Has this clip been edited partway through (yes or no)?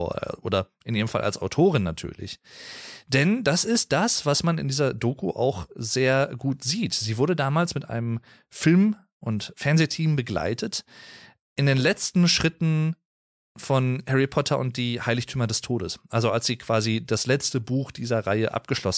no